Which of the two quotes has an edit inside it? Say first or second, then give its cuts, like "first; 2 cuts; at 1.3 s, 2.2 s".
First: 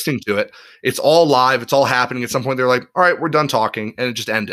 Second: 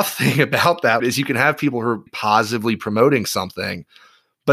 second; 2 cuts; at 1.0 s, 2.1 s